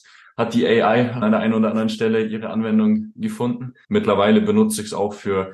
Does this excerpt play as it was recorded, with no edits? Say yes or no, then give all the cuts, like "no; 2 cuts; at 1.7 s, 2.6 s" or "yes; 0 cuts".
no; 2 cuts; at 1.2 s, 3.8 s